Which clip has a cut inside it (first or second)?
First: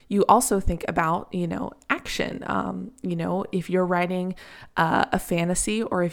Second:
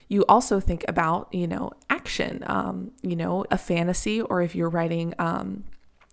second